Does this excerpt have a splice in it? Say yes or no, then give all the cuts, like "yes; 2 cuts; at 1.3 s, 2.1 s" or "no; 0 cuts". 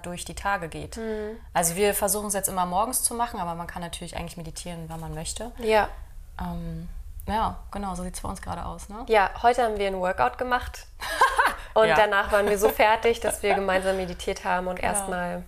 no; 0 cuts